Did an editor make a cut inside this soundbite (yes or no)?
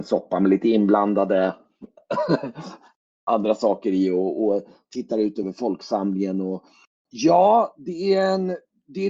no